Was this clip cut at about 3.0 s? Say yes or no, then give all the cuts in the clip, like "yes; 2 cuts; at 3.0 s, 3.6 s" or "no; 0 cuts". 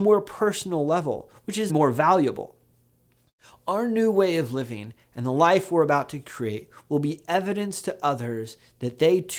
no; 1 cut; at 1.7 s